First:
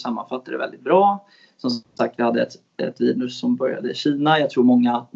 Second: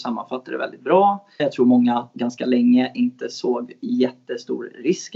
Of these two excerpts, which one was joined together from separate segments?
second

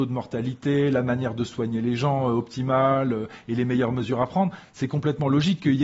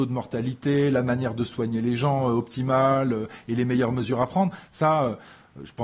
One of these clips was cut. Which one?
second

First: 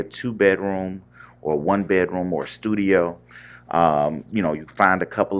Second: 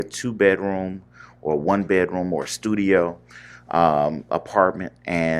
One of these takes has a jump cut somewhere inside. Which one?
first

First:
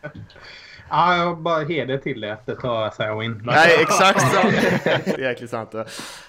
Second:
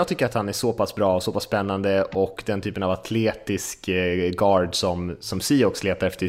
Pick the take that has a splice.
first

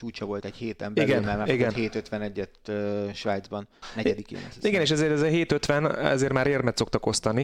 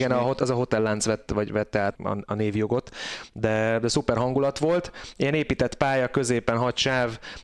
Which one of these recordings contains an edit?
second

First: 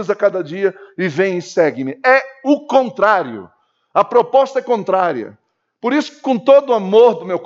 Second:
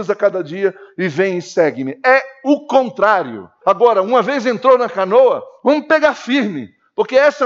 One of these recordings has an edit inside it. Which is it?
second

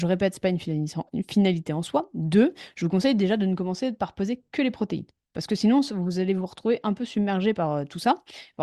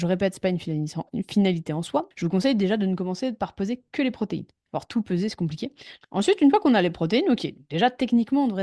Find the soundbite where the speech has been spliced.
second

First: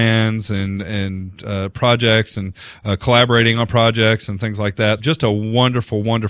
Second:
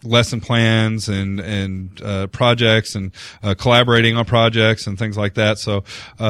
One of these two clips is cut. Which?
first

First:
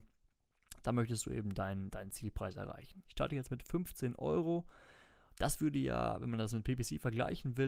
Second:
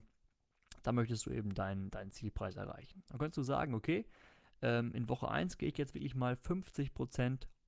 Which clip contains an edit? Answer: first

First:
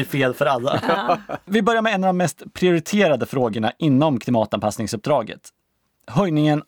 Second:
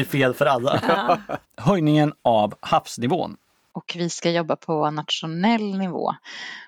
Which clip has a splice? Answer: second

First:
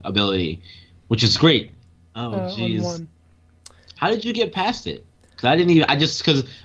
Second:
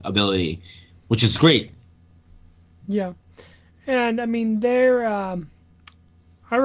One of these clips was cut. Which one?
first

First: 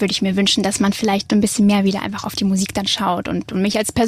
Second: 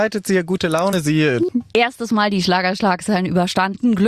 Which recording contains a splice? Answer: second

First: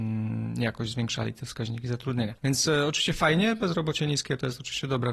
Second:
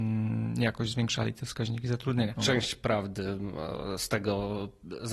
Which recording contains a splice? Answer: second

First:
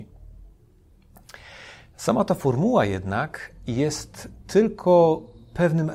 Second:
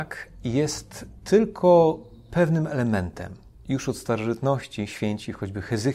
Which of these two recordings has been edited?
second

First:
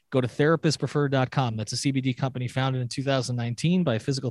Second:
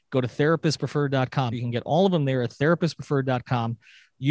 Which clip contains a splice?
second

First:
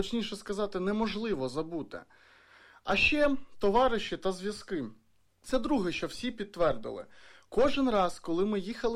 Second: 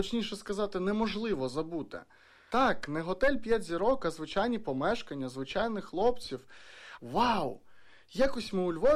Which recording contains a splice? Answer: second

